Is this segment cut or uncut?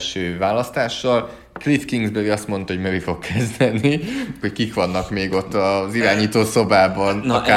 cut